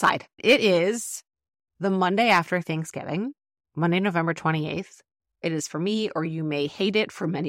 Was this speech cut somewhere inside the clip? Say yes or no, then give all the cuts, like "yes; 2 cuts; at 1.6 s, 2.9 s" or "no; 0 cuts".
yes; 1 cut; at 5.4 s